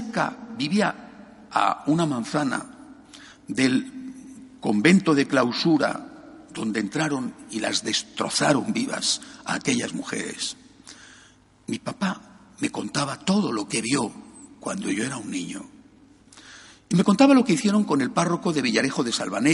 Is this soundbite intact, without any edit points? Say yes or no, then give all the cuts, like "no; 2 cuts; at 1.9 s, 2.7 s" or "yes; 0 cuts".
yes; 0 cuts